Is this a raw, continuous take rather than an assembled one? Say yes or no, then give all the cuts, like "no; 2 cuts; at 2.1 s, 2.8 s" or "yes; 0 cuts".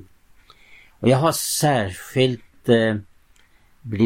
yes; 0 cuts